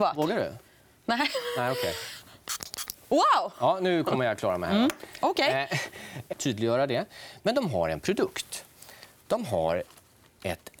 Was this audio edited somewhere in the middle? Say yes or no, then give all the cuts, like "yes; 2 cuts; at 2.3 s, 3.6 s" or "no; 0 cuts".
yes; 1 cut; at 6.3 s